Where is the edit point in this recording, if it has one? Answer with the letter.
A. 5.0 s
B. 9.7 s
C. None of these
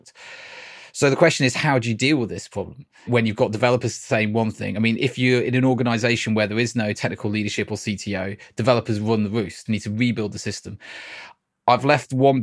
B